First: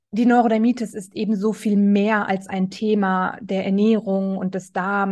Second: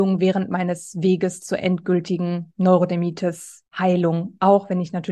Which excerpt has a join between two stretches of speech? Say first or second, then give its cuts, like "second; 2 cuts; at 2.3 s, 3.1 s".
second; 1 cut; at 3.7 s